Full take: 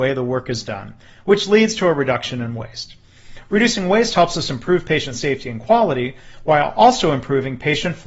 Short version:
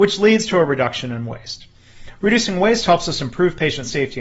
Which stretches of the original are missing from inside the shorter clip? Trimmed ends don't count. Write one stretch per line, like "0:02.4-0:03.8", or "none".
none